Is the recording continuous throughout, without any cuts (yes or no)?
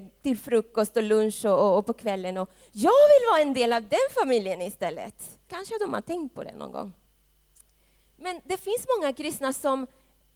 no